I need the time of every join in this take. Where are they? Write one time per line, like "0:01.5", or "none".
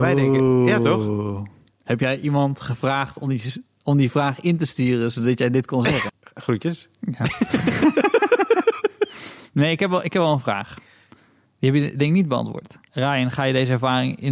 0:06.1
0:12.9